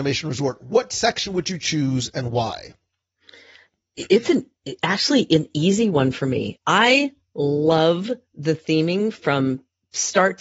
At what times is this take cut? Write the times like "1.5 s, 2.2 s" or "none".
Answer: 6.6 s